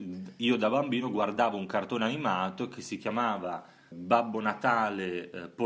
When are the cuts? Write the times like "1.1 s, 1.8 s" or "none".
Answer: 3.9 s